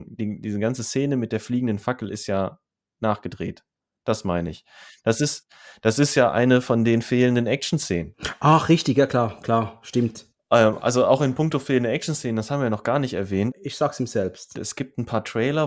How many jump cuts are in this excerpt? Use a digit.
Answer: 2